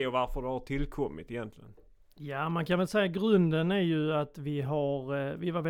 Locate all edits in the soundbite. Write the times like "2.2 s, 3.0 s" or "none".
none